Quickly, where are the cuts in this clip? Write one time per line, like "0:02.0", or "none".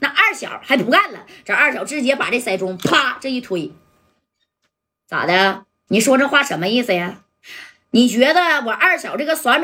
0:05.9